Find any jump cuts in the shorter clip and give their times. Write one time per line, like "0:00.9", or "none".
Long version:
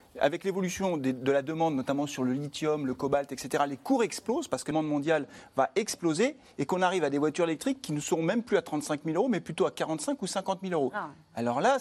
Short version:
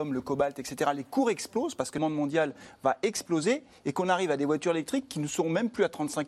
none

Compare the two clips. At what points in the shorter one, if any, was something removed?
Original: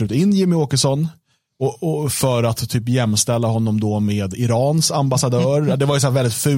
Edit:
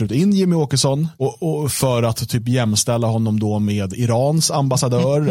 0:01.1

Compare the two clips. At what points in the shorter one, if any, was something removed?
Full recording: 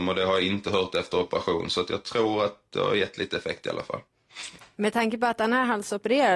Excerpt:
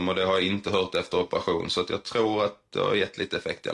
none

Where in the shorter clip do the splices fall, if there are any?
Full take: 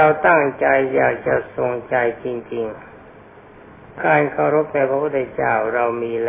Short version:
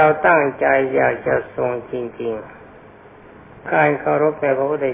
0:01.9

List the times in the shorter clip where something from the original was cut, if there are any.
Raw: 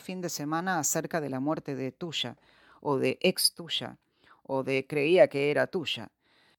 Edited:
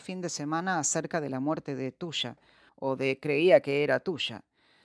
0:02.7

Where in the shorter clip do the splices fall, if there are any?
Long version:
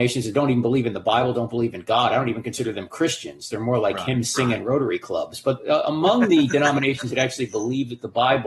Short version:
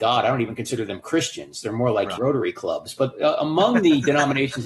0:02.2

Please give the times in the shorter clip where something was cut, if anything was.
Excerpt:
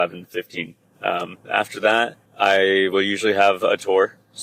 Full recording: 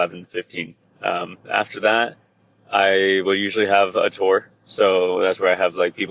0:02.3

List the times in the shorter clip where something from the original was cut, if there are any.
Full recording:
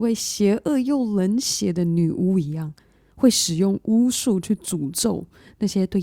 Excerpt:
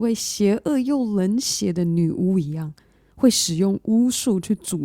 none

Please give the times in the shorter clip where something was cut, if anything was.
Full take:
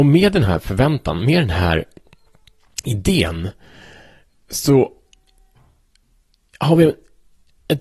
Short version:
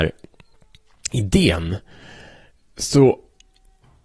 none

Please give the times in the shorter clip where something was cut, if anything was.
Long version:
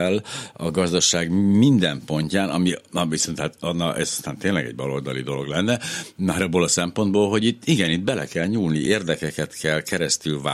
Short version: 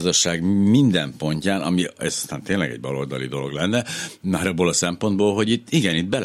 0:02.0

